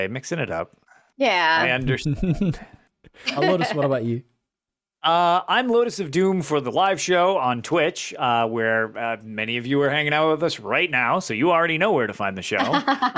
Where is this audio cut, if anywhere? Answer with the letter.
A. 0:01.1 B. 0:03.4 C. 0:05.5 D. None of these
B